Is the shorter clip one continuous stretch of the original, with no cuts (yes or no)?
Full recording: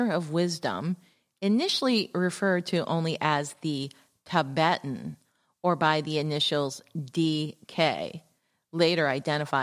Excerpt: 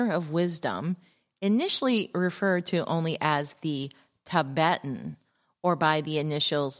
yes